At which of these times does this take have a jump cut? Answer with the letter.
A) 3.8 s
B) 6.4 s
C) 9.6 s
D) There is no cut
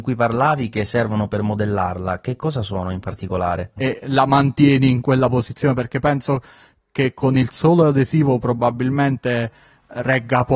A